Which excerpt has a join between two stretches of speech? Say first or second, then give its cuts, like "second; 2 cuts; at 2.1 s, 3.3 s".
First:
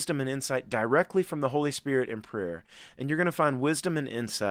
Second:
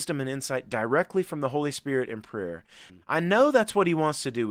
second; 1 cut; at 2.9 s